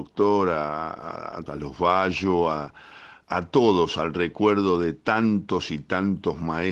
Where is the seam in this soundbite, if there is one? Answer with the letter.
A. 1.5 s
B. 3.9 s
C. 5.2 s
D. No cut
A